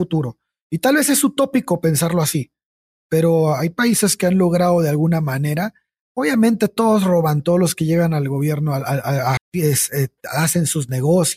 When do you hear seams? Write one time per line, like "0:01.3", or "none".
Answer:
0:09.4